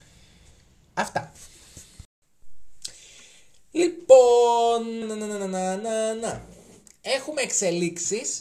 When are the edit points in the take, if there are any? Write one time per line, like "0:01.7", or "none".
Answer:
0:05.0

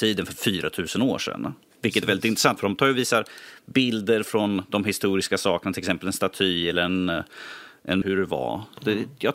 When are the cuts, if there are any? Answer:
0:02.6
0:08.0

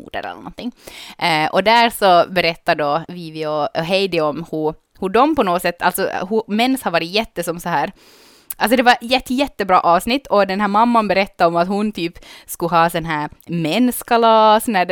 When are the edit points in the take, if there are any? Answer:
none

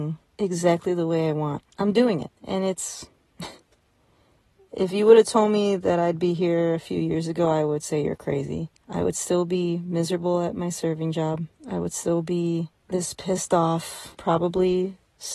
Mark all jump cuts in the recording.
0:14.2

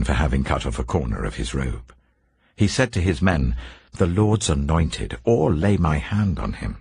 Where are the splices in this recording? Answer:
0:03.9

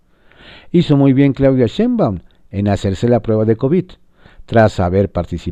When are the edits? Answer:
none

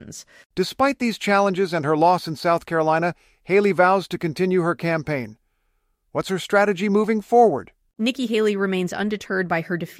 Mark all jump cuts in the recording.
none

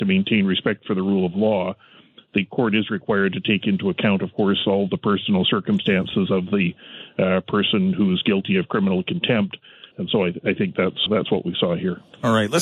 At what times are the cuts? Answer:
0:09.9
0:11.1

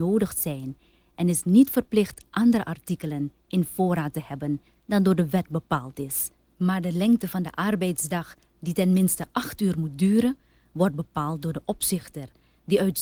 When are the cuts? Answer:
0:06.5

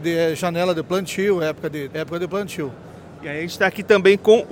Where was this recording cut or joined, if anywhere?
0:01.9
0:03.2

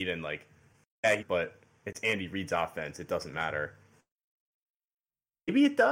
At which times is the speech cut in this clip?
0:01.2

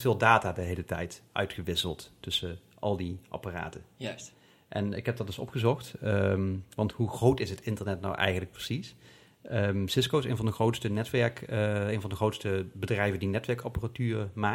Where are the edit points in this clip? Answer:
none

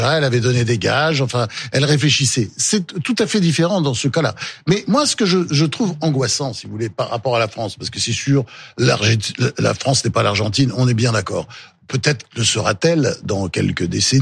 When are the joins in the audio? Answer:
none

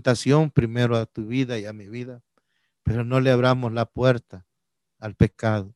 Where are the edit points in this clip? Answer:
none

